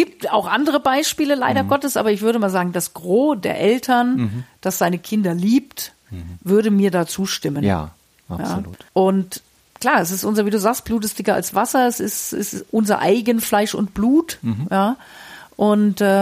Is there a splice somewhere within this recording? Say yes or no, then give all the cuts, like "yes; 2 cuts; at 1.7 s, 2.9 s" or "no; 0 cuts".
yes; 1 cut; at 8.9 s